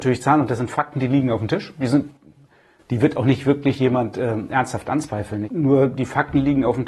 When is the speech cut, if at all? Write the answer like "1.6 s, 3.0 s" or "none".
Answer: 5.4 s